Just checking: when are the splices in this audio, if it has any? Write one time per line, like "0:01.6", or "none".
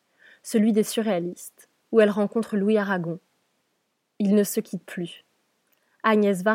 none